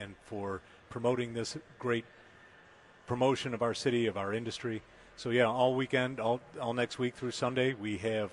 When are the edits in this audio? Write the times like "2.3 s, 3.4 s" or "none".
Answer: none